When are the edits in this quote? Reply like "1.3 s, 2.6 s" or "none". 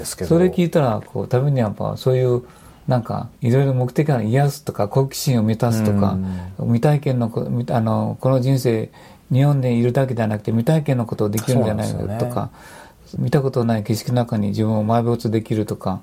3.3 s, 13.2 s

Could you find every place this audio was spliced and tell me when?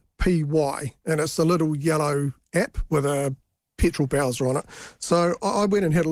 none

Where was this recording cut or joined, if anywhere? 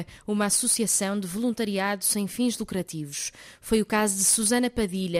none

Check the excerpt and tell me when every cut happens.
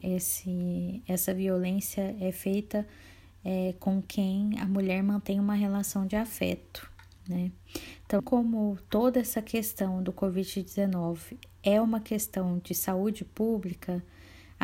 8.2 s

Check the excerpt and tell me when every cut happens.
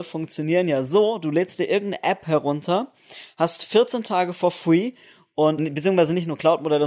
5.6 s

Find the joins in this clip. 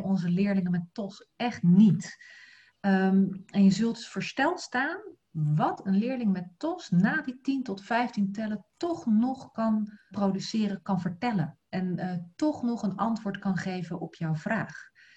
10.1 s

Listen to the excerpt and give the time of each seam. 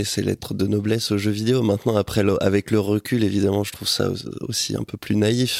none

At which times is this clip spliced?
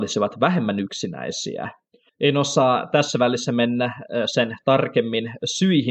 2.1 s

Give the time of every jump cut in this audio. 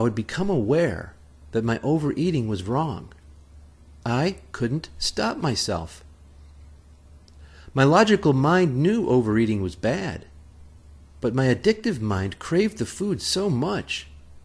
4.0 s

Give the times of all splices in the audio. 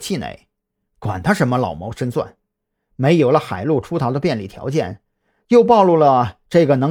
2.8 s

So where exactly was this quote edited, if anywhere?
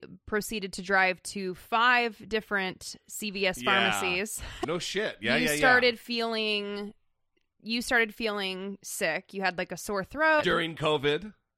4.6 s, 10.4 s

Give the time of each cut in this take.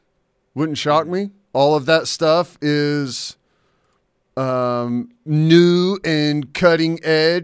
none

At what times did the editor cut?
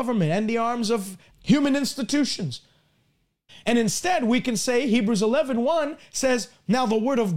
1.3 s, 3.5 s

